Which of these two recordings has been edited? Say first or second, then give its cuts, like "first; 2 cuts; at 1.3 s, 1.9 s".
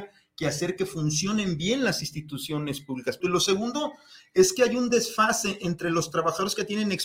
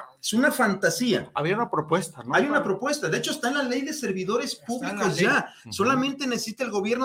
first; 1 cut; at 3.2 s